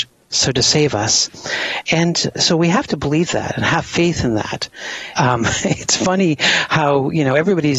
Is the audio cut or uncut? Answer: cut